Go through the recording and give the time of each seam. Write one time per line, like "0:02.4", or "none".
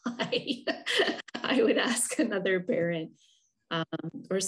none